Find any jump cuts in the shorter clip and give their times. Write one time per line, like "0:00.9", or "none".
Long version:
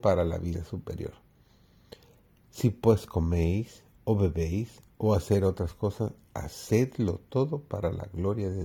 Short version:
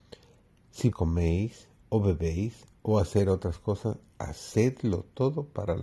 0:00.9

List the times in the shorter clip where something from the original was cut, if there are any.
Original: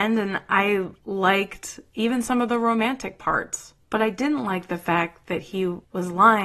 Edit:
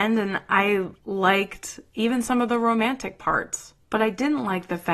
none

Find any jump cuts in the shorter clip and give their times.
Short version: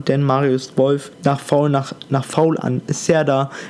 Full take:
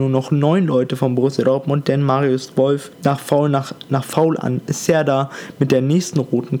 none

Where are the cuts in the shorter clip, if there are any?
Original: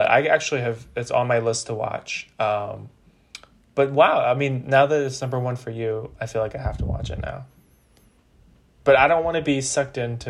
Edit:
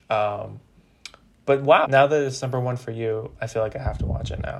0:01.8

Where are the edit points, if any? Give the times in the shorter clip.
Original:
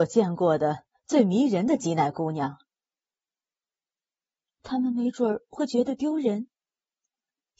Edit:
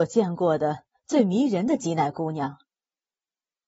none

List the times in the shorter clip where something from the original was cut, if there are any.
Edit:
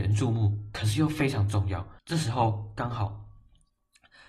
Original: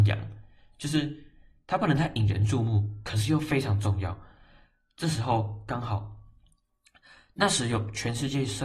0:02.0

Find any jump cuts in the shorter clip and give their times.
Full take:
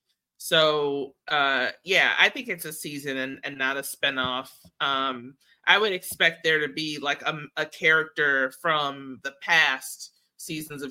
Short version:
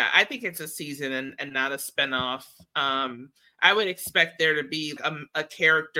0:05.0

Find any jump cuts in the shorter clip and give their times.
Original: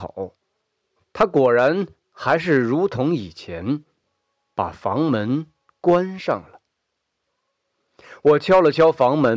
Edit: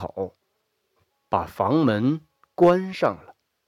0:01.1

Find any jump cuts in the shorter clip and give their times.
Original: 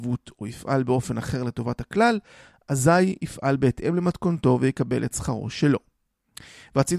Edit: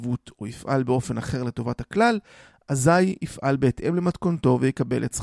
none

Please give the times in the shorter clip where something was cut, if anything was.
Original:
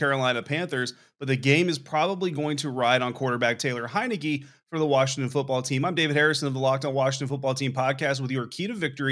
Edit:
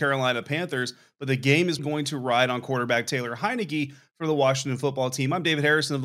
0:01.8

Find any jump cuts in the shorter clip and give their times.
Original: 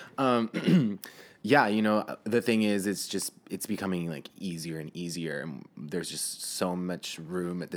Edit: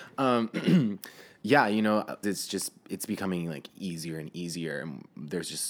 0:02.2

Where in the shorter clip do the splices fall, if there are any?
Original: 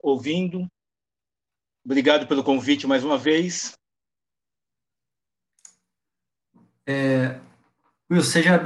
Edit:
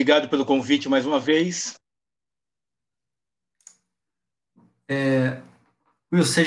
none

